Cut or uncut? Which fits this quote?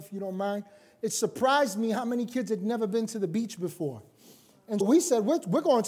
cut